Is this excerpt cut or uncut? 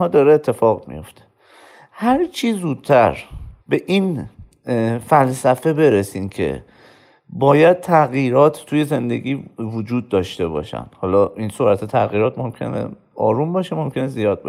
cut